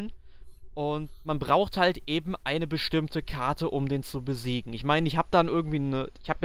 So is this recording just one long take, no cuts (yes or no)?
yes